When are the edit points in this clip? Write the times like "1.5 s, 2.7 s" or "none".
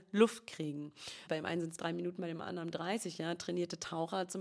1.3 s